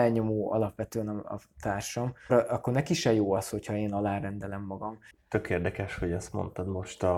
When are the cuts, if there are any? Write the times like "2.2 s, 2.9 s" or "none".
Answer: 2.3 s, 5.1 s